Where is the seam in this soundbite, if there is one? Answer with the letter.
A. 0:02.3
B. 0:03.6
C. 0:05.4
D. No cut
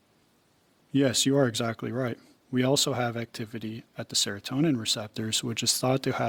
A